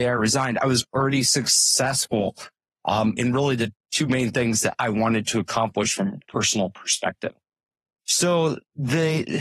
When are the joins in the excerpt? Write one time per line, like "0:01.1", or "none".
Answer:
0:03.2